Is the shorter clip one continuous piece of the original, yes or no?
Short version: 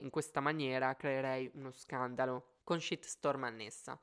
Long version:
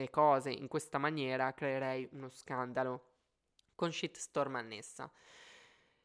no